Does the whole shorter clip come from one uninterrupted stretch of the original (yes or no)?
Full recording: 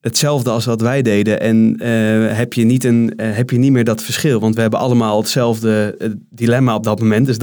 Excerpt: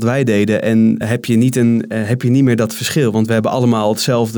no